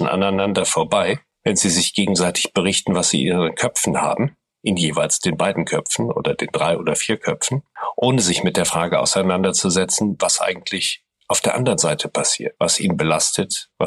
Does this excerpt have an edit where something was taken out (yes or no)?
yes